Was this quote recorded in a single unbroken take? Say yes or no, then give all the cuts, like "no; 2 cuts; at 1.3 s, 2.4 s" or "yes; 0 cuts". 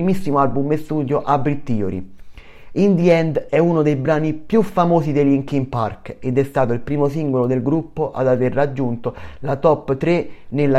yes; 0 cuts